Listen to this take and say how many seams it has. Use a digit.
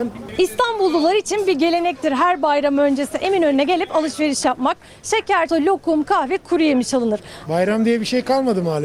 2